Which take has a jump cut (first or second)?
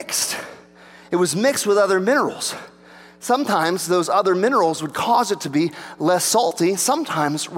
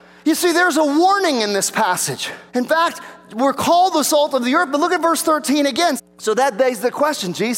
second